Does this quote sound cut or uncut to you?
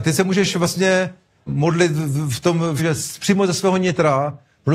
cut